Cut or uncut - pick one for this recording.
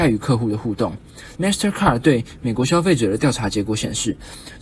cut